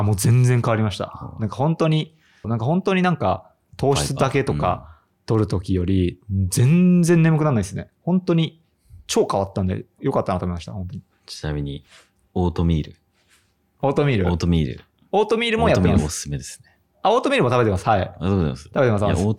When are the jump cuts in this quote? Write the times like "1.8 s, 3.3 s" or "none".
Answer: 2.4 s, 10.0 s